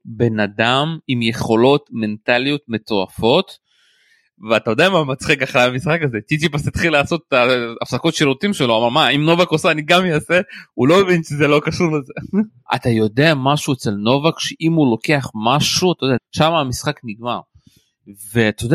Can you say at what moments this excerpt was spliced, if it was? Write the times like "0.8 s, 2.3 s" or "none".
12.7 s, 16.2 s